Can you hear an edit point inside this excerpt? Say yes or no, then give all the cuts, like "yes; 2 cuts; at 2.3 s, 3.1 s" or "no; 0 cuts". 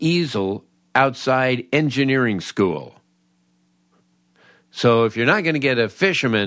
no; 0 cuts